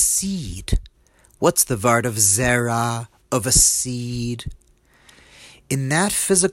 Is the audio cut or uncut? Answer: uncut